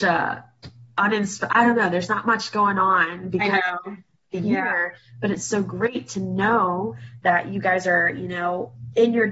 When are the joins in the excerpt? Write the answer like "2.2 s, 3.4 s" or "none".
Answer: none